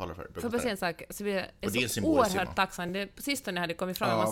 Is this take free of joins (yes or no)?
yes